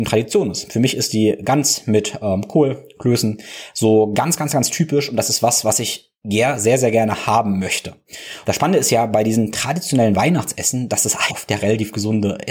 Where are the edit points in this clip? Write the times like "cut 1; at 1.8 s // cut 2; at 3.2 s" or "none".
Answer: cut 1; at 8.4 s // cut 2; at 11.3 s